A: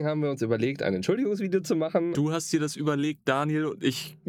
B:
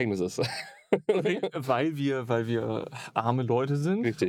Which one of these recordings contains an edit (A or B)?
A